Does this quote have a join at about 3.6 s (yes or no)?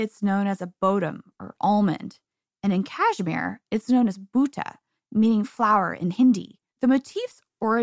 no